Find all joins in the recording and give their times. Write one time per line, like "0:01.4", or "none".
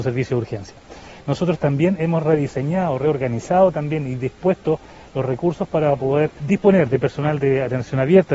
0:06.4